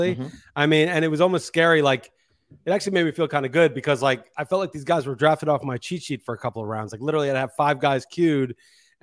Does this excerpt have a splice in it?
no; 0 cuts

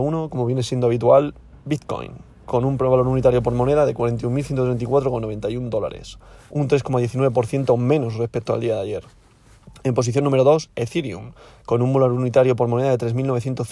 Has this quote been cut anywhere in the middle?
no; 0 cuts

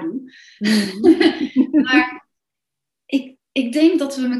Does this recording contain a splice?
yes; 1 cut; at 3.4 s

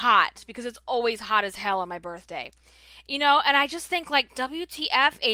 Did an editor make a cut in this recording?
no; 0 cuts

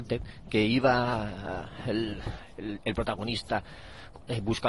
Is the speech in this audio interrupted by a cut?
no; 0 cuts

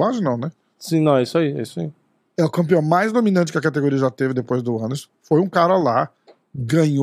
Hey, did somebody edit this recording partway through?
no; 0 cuts

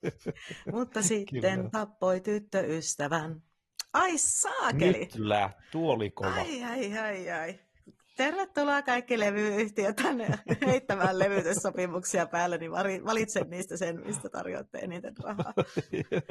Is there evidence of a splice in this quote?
yes; 1 cut; at 7.2 s

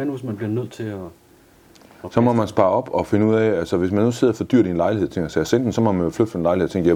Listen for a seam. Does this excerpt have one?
no; 0 cuts

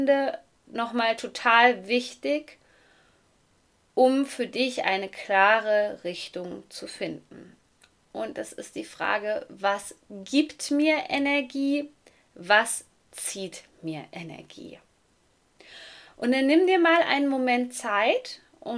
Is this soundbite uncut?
yes; 0 cuts

